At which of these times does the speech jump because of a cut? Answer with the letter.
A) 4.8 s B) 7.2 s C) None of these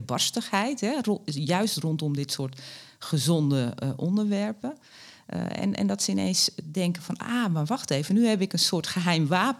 C